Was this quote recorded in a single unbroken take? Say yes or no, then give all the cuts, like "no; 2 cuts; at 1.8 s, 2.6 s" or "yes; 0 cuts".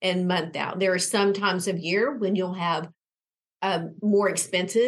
yes; 0 cuts